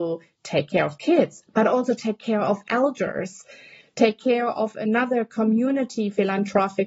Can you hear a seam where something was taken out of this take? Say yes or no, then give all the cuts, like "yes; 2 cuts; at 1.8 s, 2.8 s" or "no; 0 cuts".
no; 0 cuts